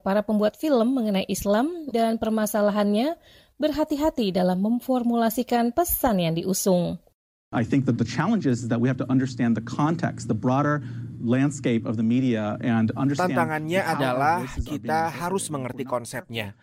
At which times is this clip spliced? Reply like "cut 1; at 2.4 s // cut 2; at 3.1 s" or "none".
cut 1; at 1.9 s